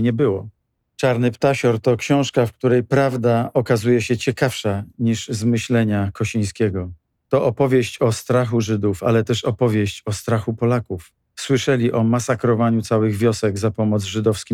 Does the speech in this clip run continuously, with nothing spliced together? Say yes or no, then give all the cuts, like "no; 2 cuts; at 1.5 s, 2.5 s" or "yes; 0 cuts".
no; 1 cut; at 11.3 s